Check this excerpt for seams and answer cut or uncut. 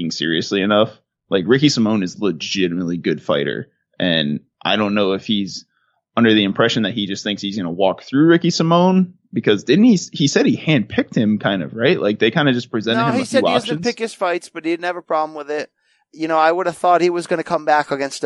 uncut